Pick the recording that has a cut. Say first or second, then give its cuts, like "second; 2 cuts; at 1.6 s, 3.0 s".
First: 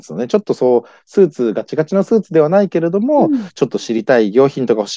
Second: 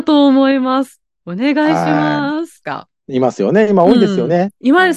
second; 1 cut; at 2.6 s